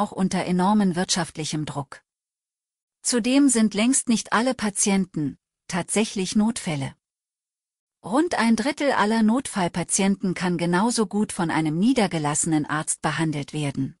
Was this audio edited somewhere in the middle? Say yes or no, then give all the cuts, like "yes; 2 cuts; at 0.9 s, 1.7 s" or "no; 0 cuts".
yes; 1 cut; at 5.6 s